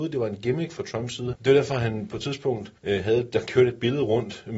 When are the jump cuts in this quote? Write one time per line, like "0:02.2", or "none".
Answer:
0:01.3
0:02.8